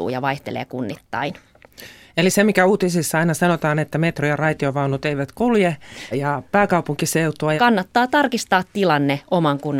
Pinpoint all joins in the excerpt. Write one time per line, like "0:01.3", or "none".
0:06.1
0:07.6